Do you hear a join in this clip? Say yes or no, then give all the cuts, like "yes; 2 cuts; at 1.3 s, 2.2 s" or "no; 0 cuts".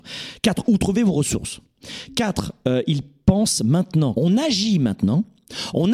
yes; 1 cut; at 4.1 s